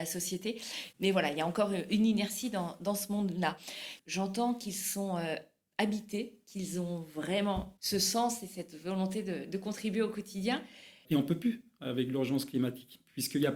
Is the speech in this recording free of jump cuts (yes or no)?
no